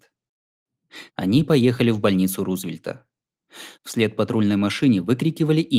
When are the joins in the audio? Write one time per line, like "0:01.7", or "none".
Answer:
0:01.1
0:03.7